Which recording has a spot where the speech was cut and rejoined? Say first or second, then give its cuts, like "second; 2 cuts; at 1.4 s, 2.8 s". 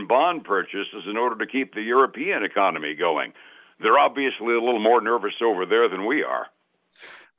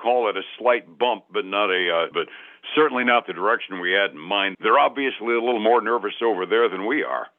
second; 2 cuts; at 2.1 s, 4.5 s